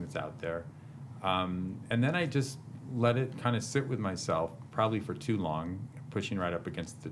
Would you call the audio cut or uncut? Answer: uncut